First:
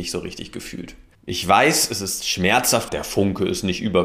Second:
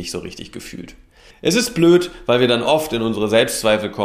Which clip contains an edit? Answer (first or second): first